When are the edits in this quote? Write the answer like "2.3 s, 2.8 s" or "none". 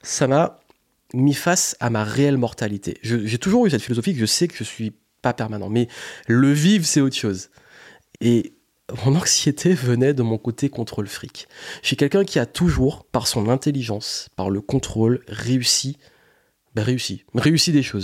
8.1 s, 13.1 s